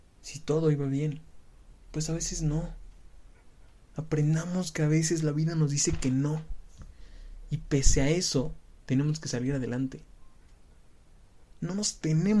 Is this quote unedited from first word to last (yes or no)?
yes